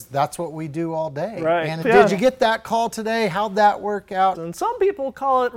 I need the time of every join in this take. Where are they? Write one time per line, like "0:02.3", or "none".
0:01.8
0:04.3